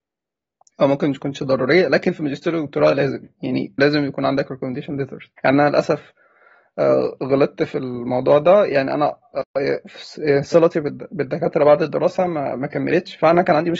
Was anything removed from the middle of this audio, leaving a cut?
yes; 2 cuts; at 3.8 s, 5.4 s

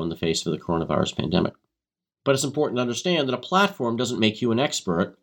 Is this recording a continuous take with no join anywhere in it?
no; 1 cut; at 2.1 s

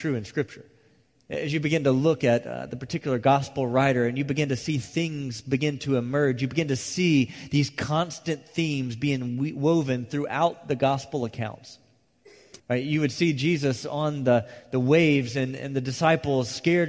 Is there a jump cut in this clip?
yes; 1 cut; at 12.6 s

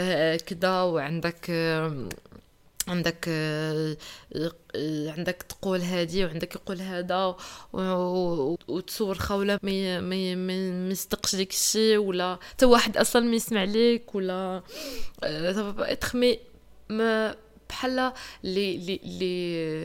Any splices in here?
yes; 2 cuts; at 8.6 s, 9.6 s

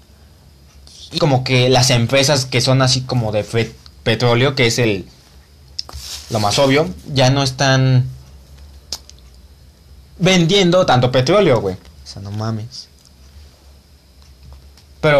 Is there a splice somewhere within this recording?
yes; 2 cuts; at 1.2 s, 11.9 s

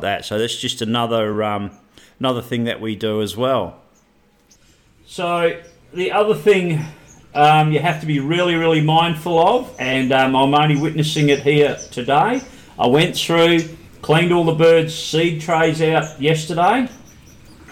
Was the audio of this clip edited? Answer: no; 0 cuts

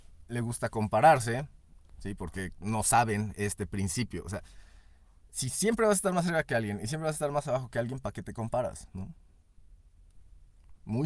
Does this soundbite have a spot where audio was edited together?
no; 0 cuts

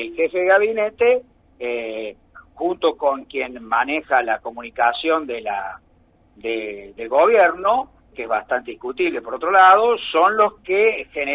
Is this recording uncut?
no; 1 cut; at 8.1 s

